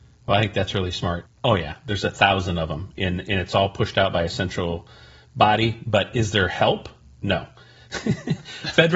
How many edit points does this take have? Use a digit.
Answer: 1